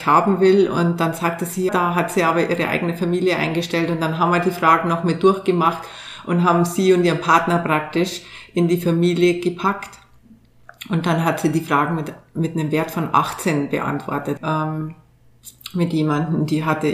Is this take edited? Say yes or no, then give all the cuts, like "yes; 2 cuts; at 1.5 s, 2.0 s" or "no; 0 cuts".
yes; 2 cuts; at 1.7 s, 14.4 s